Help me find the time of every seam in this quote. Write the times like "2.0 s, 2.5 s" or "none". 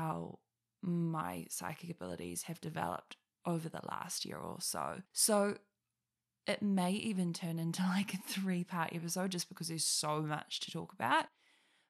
5.1 s